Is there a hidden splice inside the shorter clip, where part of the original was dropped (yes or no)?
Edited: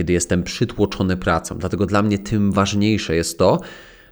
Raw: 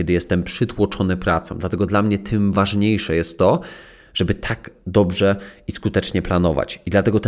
no